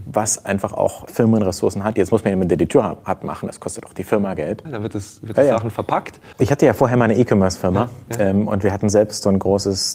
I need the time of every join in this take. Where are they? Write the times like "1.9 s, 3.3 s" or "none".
4.6 s